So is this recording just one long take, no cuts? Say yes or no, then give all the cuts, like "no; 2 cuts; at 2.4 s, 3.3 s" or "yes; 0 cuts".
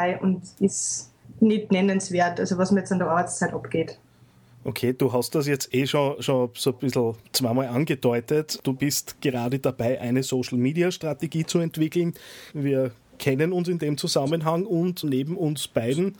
no; 2 cuts; at 12.5 s, 15.0 s